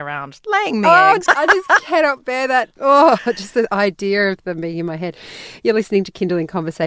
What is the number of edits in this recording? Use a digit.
2